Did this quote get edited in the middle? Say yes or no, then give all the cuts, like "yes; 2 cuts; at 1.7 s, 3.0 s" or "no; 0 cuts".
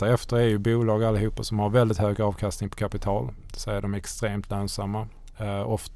no; 0 cuts